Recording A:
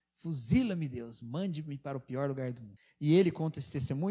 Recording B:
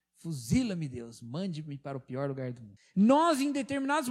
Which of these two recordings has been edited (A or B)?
B